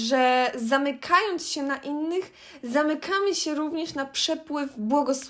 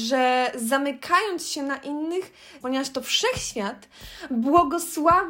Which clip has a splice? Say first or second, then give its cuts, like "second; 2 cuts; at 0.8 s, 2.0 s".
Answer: second; 1 cut; at 2.6 s